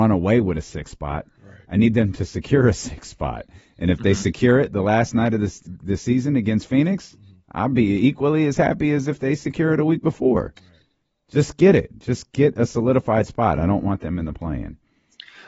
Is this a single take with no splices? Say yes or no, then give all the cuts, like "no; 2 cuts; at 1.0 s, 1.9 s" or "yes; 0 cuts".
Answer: yes; 0 cuts